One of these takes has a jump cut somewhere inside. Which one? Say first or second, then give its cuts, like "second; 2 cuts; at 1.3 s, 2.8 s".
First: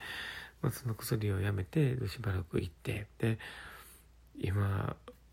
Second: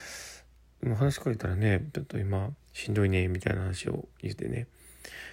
second; 1 cut; at 4.4 s